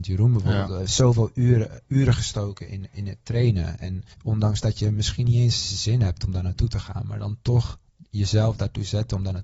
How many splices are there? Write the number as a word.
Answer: one